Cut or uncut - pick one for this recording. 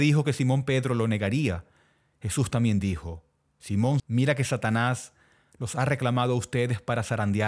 cut